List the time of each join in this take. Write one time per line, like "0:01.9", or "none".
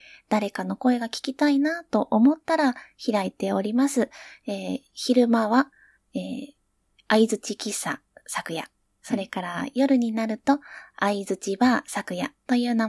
none